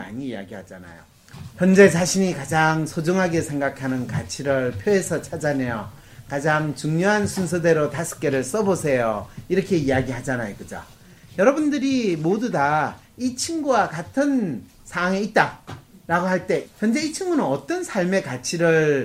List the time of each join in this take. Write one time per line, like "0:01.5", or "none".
0:16.6